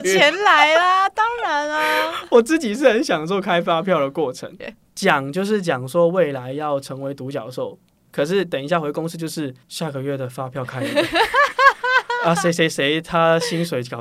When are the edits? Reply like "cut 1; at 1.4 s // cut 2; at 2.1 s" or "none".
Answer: cut 1; at 4.6 s // cut 2; at 9.6 s